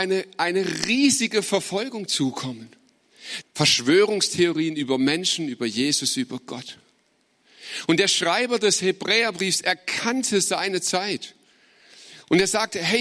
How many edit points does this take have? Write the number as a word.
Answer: one